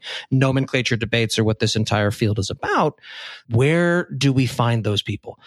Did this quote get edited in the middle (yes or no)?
yes